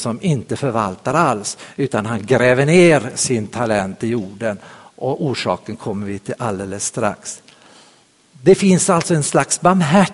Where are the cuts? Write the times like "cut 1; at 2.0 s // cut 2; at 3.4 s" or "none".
none

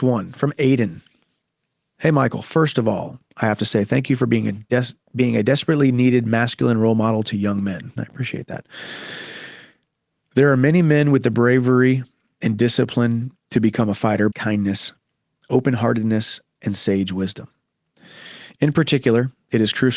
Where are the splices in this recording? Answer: cut 1; at 8.0 s // cut 2; at 14.3 s

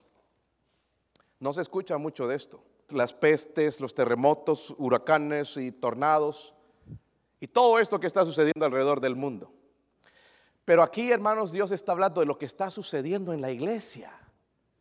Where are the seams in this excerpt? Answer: cut 1; at 2.9 s

